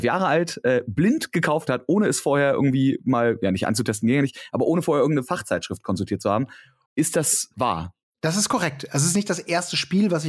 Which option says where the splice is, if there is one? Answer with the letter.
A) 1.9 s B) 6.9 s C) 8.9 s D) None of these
B